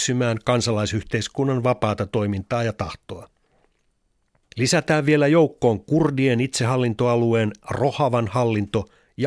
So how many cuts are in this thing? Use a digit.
1